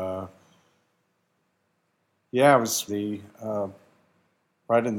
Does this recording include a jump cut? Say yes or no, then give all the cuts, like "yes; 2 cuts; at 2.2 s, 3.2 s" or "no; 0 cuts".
yes; 1 cut; at 2.9 s